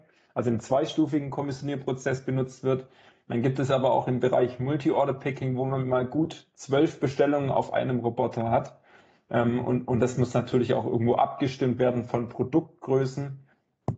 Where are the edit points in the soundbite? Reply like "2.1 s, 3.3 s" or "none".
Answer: none